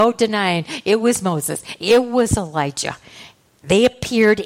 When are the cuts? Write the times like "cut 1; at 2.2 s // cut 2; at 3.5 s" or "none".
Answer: none